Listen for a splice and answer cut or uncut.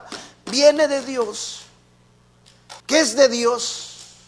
cut